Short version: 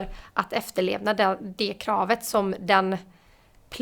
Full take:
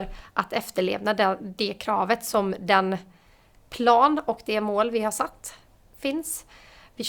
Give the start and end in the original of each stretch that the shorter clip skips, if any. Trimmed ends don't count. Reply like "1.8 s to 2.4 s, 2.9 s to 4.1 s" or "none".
none